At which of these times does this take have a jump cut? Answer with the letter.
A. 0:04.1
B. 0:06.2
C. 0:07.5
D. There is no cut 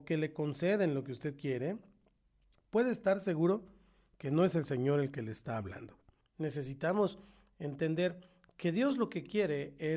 B